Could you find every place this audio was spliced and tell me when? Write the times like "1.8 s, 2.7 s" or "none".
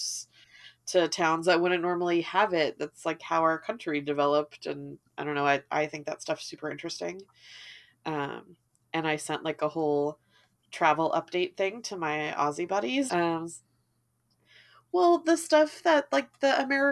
13.1 s